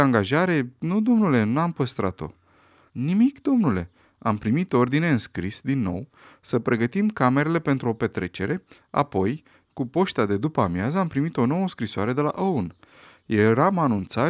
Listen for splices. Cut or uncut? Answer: cut